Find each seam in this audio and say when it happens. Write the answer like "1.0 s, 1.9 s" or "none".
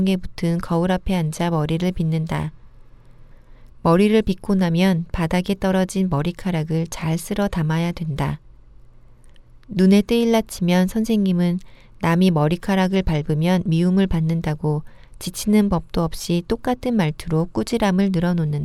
3.7 s